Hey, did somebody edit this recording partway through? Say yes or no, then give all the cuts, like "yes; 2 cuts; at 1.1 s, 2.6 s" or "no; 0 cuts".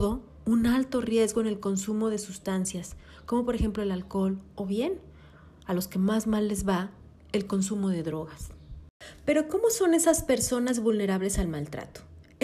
no; 0 cuts